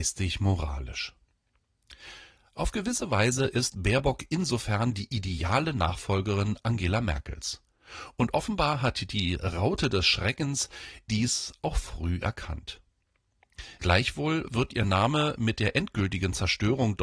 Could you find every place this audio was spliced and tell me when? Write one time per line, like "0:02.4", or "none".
0:11.1
0:13.8